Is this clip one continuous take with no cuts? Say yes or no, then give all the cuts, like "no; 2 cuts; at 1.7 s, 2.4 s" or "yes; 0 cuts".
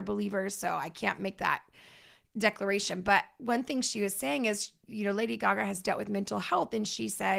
yes; 0 cuts